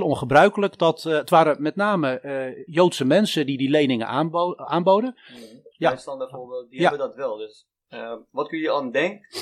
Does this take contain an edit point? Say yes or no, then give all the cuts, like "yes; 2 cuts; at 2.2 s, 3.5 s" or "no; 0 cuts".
yes; 2 cuts; at 2.7 s, 5.7 s